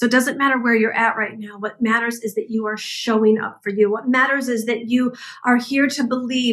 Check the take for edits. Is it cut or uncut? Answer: uncut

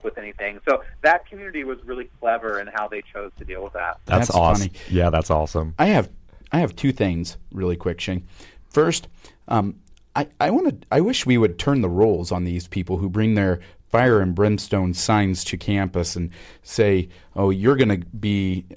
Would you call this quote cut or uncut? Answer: uncut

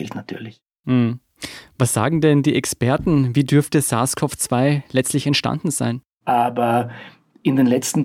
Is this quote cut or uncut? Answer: cut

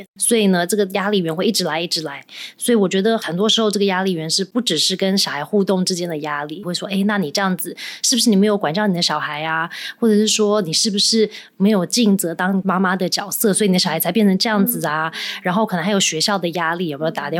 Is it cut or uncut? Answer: cut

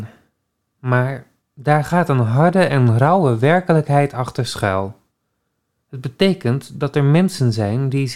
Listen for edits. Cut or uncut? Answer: cut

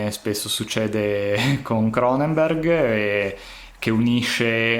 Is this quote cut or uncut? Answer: uncut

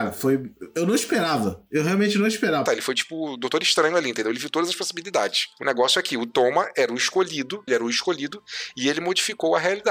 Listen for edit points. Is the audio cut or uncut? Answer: cut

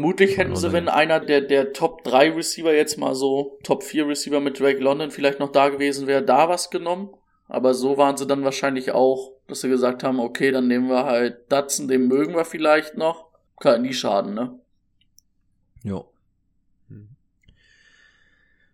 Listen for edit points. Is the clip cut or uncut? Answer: cut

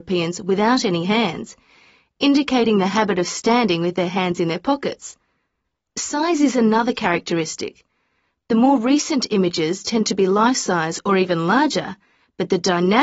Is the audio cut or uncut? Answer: uncut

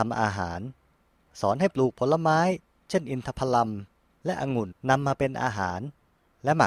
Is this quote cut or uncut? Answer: cut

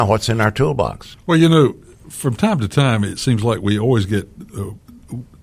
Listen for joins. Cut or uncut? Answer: cut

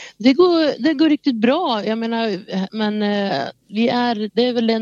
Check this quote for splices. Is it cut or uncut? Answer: cut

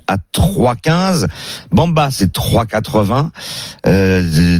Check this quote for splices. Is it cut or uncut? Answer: uncut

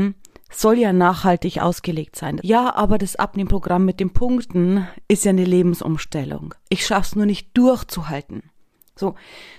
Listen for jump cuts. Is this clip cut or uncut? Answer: cut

